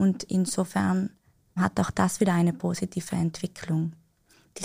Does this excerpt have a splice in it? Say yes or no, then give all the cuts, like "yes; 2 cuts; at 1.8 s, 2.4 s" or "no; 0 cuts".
no; 0 cuts